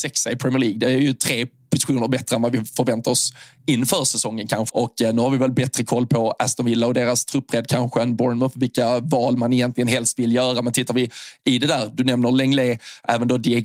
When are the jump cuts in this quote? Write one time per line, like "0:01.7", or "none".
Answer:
0:04.7